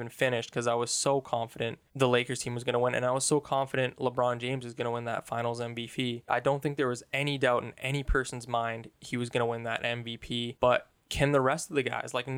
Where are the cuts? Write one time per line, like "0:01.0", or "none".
0:06.3
0:10.6